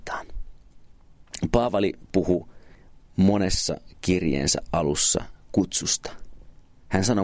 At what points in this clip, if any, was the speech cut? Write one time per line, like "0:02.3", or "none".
none